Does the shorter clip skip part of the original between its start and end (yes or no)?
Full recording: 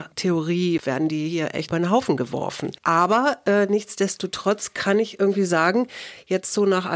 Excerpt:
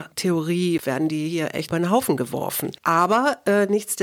no